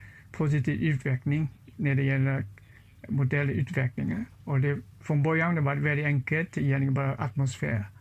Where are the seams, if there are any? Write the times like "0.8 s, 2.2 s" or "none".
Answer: none